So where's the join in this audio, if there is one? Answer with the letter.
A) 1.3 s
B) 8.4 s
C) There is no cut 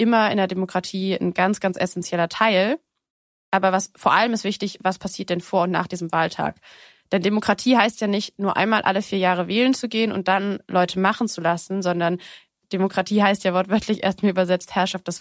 C